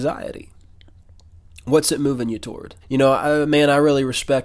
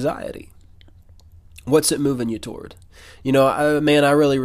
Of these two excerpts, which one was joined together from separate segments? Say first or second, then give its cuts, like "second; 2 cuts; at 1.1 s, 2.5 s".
first; 1 cut; at 2.8 s